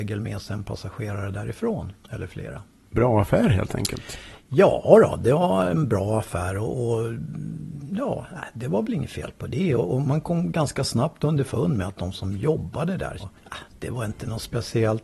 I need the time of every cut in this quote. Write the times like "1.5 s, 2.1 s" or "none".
13.2 s